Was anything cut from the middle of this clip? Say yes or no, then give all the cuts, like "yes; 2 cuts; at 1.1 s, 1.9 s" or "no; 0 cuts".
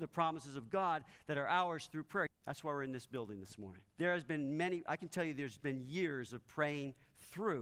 yes; 2 cuts; at 2.3 s, 3.9 s